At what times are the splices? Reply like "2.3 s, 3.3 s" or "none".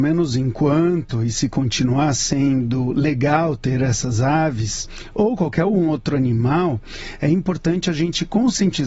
none